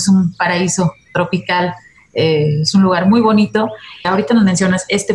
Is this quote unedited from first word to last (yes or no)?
no